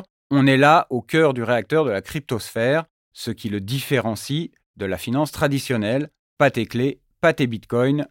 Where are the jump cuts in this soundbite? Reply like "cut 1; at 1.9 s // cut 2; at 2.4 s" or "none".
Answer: none

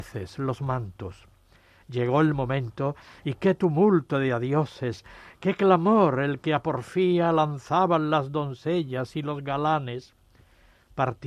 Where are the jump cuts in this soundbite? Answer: none

